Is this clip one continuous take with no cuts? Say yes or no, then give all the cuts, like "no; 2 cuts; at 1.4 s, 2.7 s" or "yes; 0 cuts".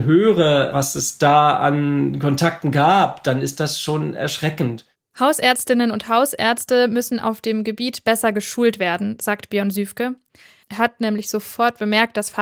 no; 1 cut; at 10.6 s